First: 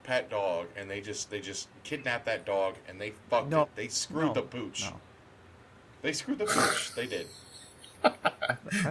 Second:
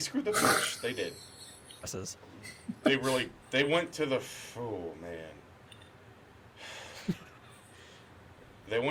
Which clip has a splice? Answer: second; 2 cuts; at 1.8 s, 3.4 s

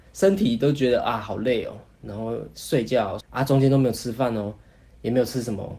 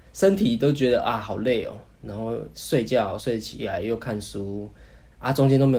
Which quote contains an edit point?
first; 1 cut; at 3.2 s

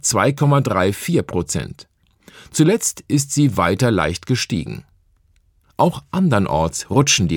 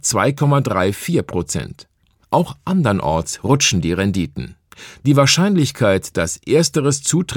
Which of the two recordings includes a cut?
second; 2 cuts; at 2.2 s, 4.9 s

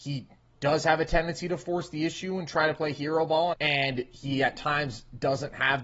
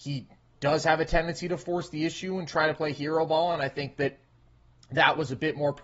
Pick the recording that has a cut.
first; 1 cut; at 3.5 s

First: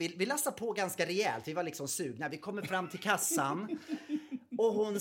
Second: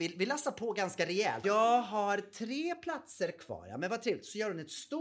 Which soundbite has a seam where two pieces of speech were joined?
second; 1 cut; at 1.4 s

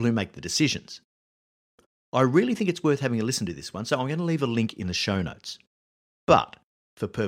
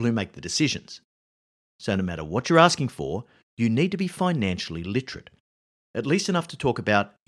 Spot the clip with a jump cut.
second; 1 cut; at 1.7 s

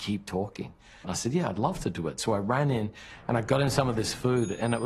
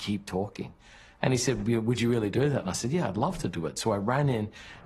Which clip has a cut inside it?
first; 1 cut; at 1.0 s

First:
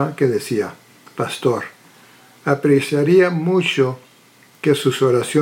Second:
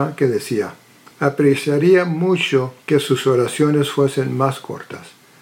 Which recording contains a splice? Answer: second; 2 cuts; at 1.1 s, 2.8 s

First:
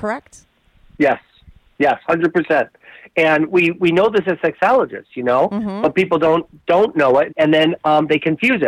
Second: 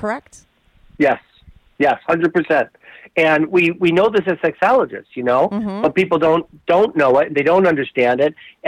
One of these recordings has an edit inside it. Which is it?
first; 1 cut; at 7.3 s

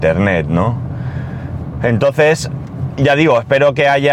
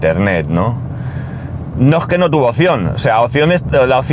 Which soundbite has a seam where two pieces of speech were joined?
second; 1 cut; at 1.7 s

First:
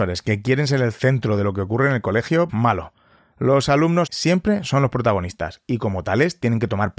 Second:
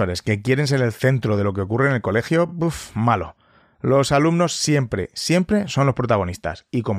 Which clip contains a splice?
first; 2 cuts; at 2.5 s, 4.1 s

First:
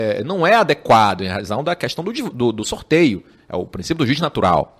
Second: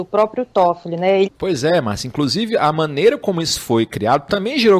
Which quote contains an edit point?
second; 1 cut; at 1.2 s

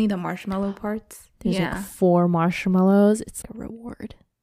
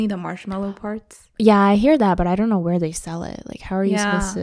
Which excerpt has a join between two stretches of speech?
first; 2 cuts; at 1.3 s, 3.4 s

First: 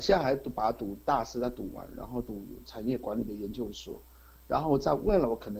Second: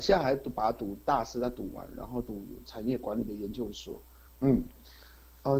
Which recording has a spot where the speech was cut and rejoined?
second; 1 cut; at 4.3 s

